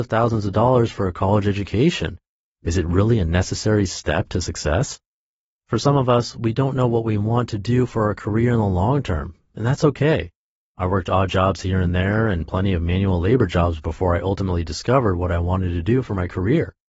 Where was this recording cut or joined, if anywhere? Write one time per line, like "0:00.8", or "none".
none